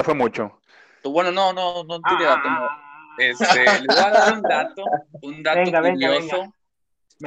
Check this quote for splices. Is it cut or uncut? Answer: cut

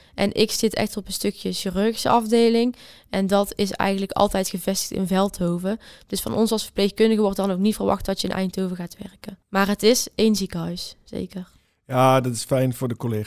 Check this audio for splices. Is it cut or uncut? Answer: cut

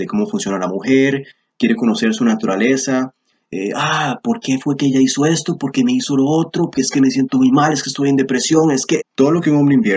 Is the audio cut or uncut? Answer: cut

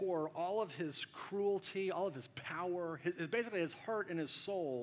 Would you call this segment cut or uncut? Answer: uncut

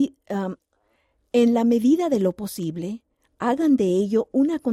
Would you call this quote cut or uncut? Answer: uncut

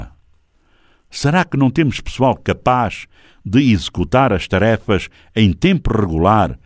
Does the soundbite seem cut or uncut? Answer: uncut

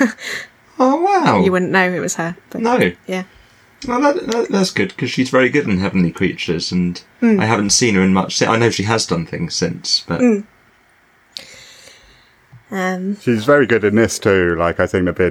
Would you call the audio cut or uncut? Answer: uncut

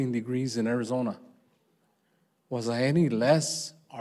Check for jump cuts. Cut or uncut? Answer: uncut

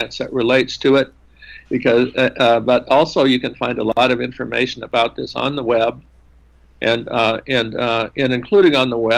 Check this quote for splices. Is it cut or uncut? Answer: cut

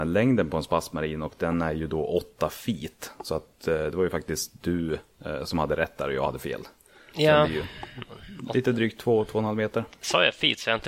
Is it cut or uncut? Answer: uncut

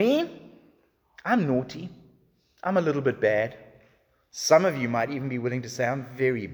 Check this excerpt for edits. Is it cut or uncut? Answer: uncut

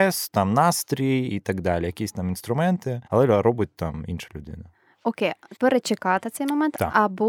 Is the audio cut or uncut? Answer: cut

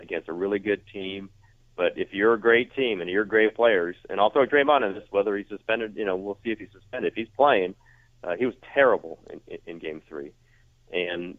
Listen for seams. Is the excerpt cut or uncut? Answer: uncut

